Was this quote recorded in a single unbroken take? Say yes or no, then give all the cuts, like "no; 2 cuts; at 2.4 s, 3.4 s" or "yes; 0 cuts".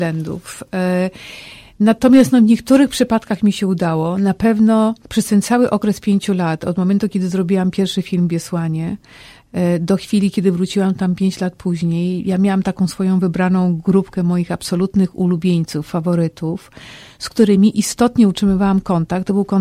no; 1 cut; at 5.0 s